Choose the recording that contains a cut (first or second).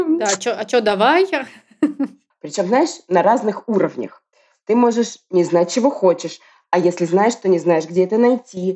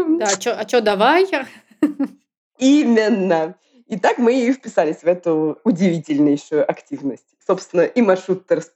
first